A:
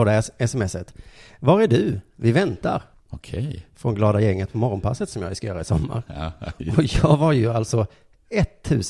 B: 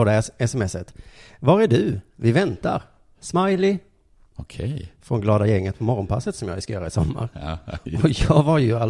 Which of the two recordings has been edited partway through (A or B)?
A